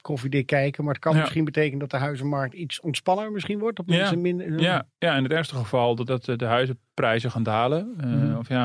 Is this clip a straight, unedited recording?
no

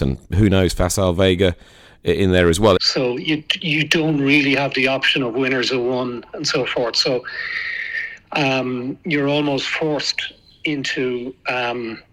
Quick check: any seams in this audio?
yes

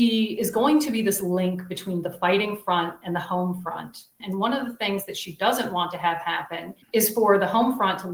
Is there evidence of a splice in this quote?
yes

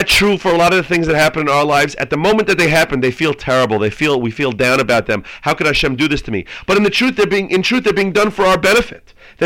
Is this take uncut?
yes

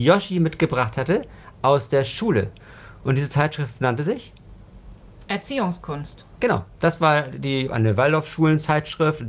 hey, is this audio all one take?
no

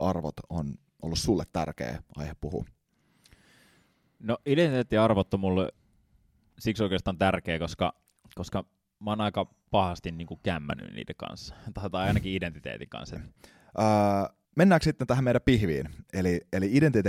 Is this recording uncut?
no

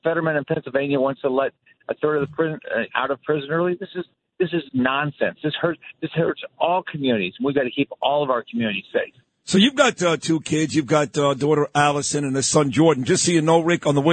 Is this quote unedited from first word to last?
no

